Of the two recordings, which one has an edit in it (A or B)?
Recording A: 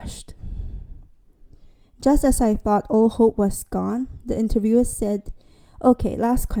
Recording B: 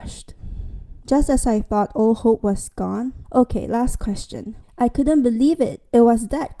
B